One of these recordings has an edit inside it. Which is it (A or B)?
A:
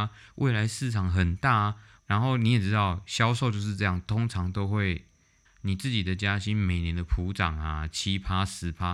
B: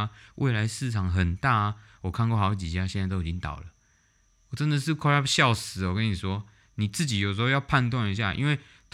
A